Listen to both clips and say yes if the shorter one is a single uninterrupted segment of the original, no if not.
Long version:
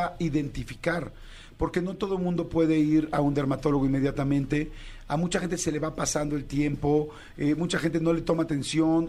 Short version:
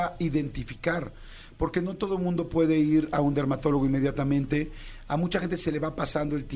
yes